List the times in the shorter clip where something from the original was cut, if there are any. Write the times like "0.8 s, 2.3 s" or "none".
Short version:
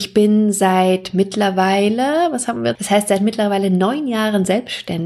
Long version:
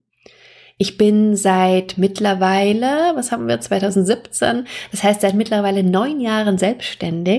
2.7 s

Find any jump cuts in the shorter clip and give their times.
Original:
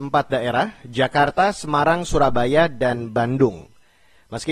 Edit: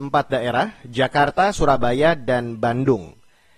1.5 s

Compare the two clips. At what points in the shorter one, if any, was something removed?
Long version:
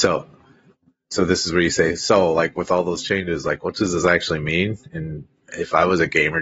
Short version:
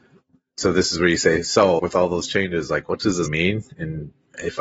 1.8 s, 3.3 s

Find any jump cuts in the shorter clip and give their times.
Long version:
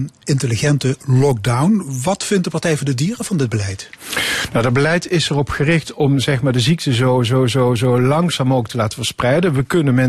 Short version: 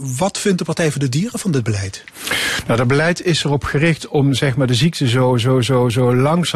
none

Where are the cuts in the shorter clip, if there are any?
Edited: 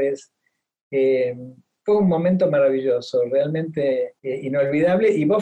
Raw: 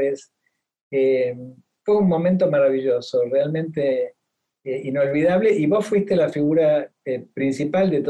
4.2 s

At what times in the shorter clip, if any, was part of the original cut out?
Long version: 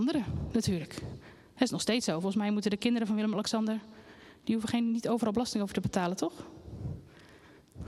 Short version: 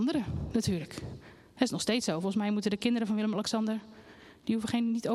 none

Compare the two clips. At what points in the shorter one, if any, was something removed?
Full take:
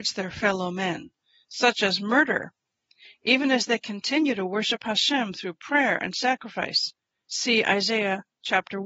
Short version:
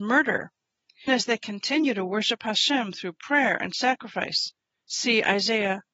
1.1 s

